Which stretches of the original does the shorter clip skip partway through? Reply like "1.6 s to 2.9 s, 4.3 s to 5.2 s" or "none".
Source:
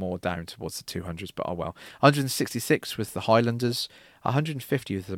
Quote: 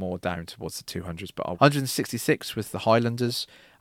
1.5 s to 2.0 s